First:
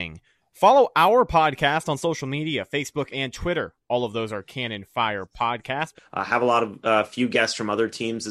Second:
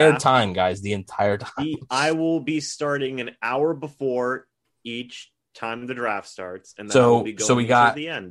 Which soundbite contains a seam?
first; 2 cuts; at 3.1 s, 5.9 s

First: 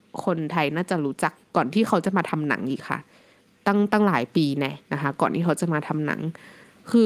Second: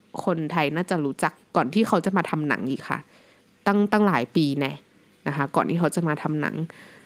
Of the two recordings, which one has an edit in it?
first; 1 cut; at 4.8 s

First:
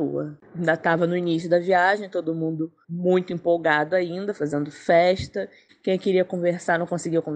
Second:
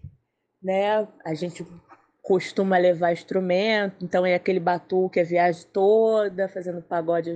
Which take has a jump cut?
first; 3 cuts; at 2.8 s, 4.4 s, 5.7 s

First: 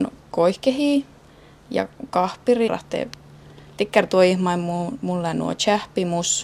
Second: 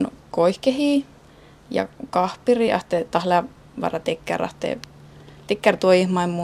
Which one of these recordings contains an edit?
first; 1 cut; at 2.7 s

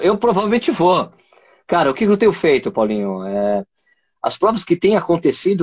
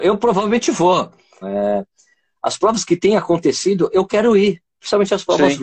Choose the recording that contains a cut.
second; 1 cut; at 1.4 s

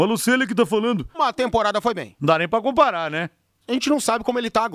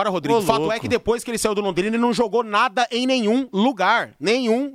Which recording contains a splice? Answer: first; 2 cuts; at 1.1 s, 2.2 s

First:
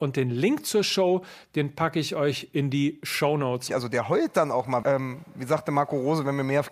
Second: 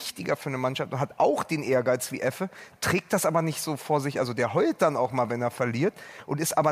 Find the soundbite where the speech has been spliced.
first; 2 cuts; at 3.7 s, 4.8 s

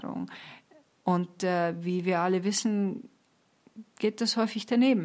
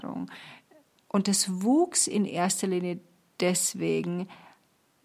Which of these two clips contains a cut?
second; 1 cut; at 0.9 s

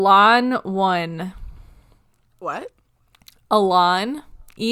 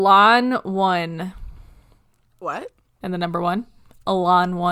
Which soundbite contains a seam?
second; 1 cut; at 3.0 s

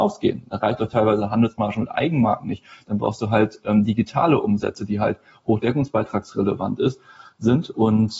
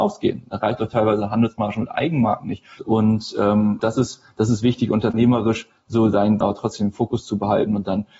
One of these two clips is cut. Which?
second; 3 cuts; at 2.8 s, 3.8 s, 6.4 s

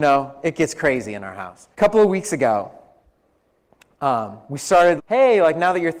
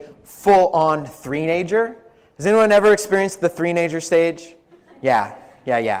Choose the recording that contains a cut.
first; 2 cuts; at 1.7 s, 5.0 s

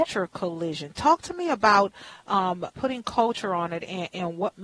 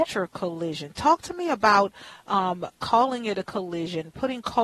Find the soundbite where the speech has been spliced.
first; 1 cut; at 2.7 s

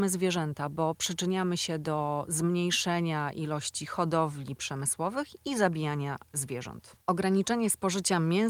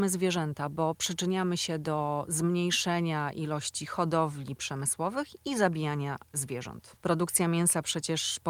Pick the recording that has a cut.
second; 1 cut; at 7.0 s

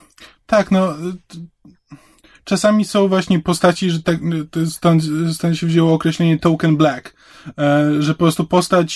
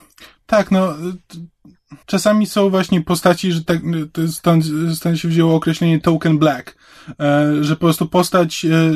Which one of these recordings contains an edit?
second; 1 cut; at 2.0 s

